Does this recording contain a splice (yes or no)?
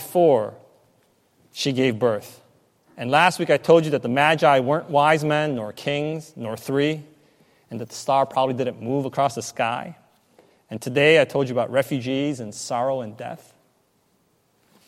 no